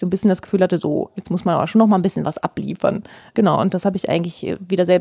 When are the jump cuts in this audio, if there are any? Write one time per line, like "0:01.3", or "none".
none